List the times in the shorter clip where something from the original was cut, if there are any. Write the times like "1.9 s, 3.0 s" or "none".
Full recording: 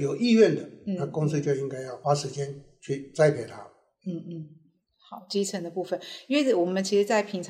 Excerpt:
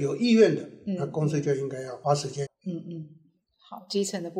2.5 s